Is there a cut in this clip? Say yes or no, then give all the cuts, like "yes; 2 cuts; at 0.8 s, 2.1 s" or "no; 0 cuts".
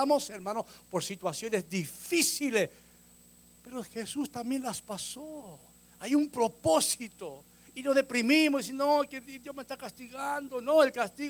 no; 0 cuts